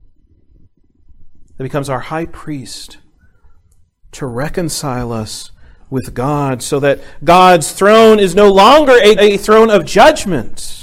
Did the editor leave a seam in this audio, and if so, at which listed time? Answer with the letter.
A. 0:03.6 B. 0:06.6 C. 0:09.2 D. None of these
C